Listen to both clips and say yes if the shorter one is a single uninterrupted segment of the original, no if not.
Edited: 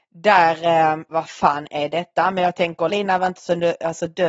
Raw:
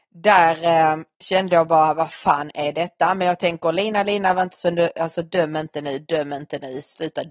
no